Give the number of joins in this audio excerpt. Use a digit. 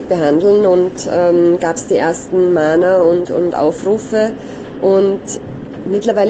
0